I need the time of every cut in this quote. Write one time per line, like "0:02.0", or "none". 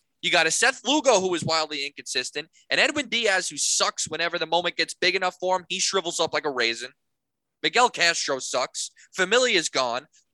none